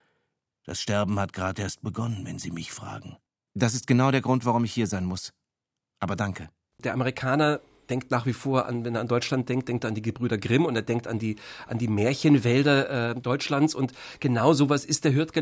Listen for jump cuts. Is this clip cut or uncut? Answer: uncut